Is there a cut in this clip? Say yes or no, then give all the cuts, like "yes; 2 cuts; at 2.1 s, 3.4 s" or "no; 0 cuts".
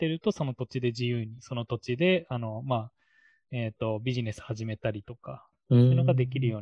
no; 0 cuts